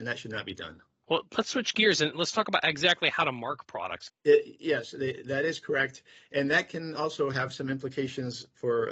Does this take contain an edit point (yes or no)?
yes